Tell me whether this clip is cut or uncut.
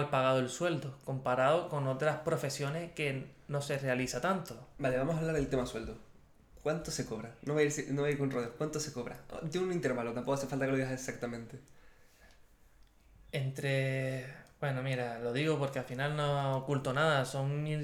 uncut